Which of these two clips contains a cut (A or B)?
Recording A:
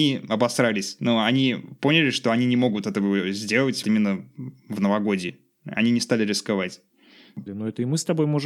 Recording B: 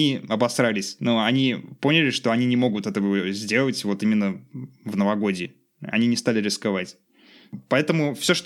A